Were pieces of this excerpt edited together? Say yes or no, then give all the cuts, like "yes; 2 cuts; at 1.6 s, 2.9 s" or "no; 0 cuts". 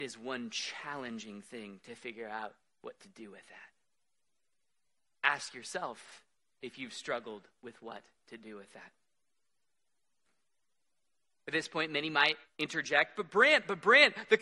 no; 0 cuts